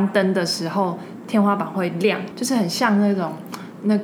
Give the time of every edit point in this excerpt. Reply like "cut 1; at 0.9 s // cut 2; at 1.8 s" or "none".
cut 1; at 2.3 s